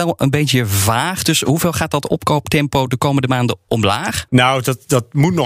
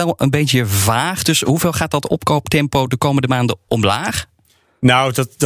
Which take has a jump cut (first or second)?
first